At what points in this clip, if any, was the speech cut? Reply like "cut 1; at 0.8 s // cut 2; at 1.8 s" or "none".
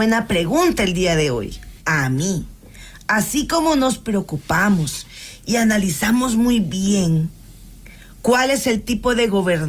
cut 1; at 1.8 s